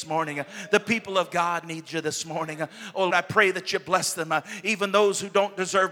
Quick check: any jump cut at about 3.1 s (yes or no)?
yes